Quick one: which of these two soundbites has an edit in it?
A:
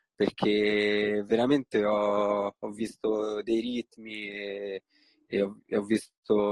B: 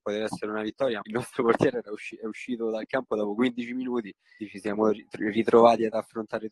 B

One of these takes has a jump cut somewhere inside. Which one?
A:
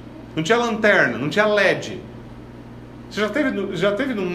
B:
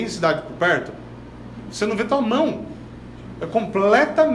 B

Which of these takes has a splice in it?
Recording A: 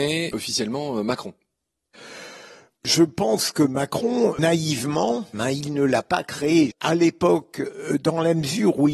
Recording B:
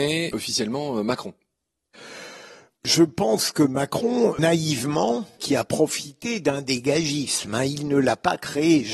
A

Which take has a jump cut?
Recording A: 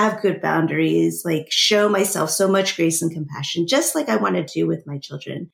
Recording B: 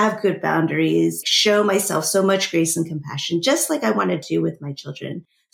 B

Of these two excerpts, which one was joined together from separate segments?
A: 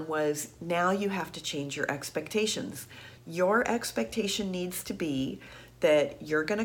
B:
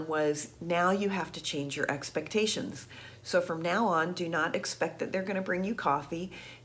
A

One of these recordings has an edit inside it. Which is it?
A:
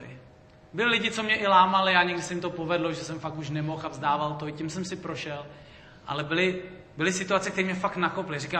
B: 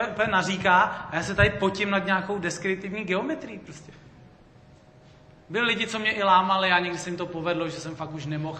B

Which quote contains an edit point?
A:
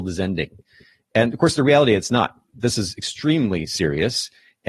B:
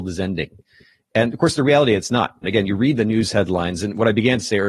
B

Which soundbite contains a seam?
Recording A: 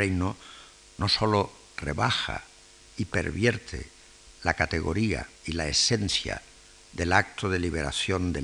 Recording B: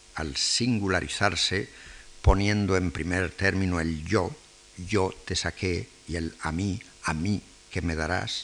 A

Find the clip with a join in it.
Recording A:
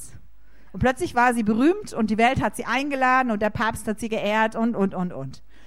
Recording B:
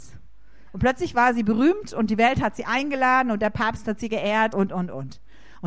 B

